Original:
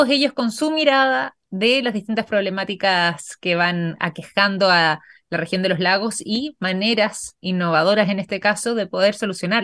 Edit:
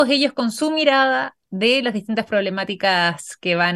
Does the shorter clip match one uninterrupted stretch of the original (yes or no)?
yes